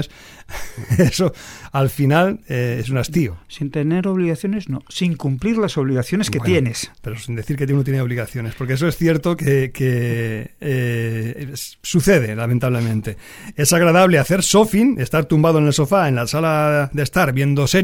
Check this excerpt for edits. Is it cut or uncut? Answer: uncut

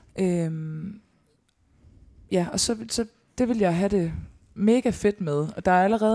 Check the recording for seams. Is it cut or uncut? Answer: uncut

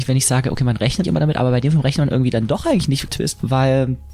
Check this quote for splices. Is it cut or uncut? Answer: cut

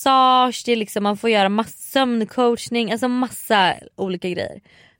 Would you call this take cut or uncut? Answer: uncut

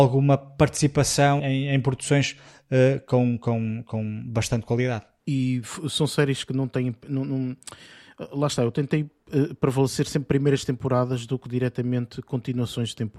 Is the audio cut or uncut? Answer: cut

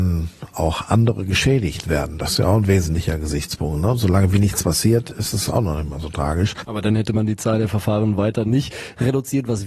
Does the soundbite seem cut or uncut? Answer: cut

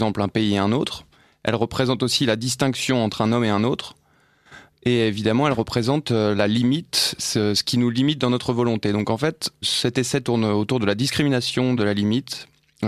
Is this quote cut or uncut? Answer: cut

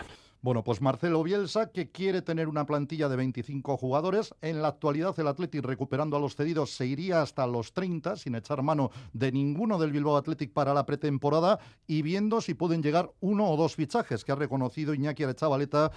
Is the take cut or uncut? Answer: uncut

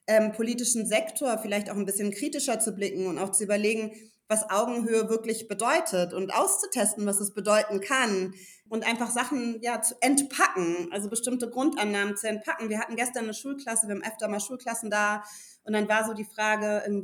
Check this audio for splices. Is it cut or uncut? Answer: cut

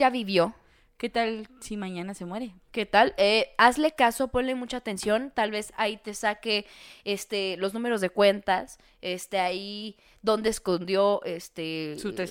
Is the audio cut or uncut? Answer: uncut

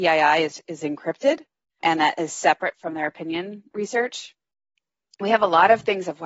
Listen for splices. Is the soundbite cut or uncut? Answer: cut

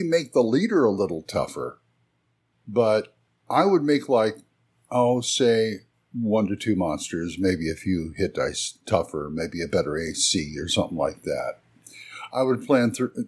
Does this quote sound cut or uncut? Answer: uncut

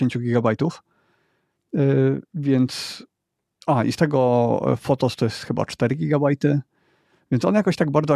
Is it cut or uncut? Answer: cut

